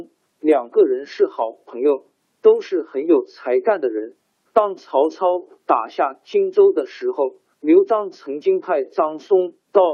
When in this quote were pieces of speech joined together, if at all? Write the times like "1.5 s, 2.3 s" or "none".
4.4 s